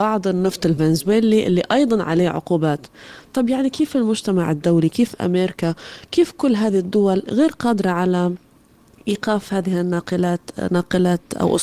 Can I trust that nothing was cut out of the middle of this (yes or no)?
yes